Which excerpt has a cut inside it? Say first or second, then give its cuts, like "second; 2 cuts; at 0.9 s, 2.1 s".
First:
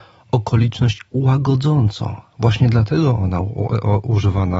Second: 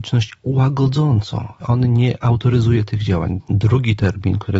second; 2 cuts; at 1.6 s, 3.4 s